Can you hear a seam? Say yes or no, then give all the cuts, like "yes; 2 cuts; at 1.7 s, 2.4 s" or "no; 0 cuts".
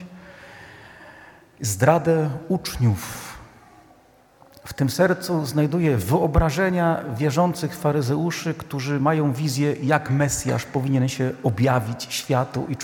no; 0 cuts